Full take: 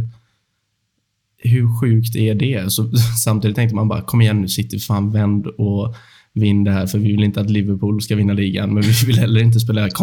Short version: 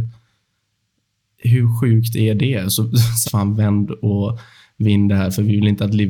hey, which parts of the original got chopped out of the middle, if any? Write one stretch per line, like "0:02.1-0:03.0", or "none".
0:03.2-0:04.8